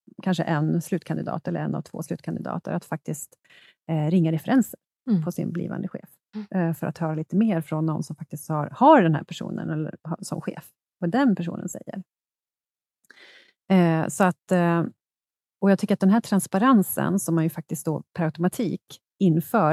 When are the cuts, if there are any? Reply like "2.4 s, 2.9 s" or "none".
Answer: none